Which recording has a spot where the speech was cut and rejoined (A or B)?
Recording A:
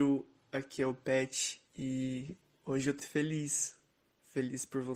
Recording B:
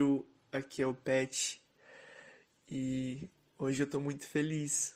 A